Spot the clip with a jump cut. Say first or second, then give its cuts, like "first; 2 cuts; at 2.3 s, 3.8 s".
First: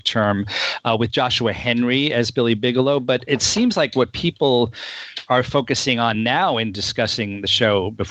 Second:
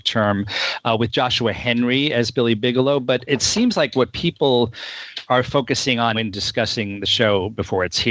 second; 1 cut; at 6.1 s